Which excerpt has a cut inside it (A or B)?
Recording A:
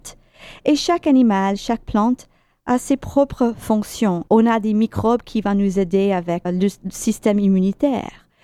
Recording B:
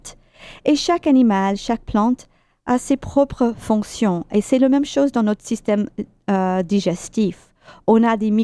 A